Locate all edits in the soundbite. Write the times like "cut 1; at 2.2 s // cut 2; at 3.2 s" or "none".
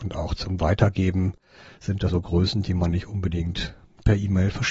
cut 1; at 2.1 s

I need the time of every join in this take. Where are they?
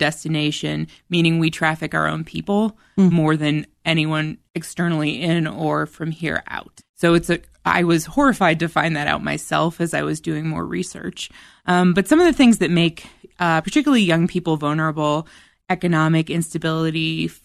none

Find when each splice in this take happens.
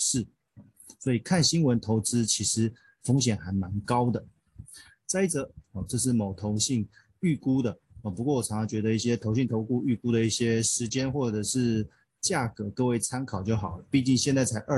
cut 1; at 5.6 s

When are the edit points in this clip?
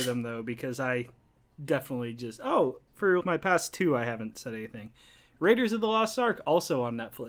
cut 1; at 3.2 s

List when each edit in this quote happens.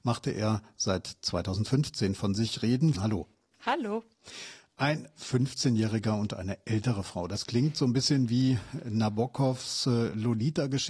cut 1; at 2.9 s

